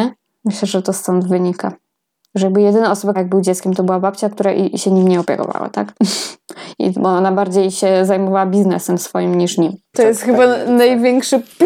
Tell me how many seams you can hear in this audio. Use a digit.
2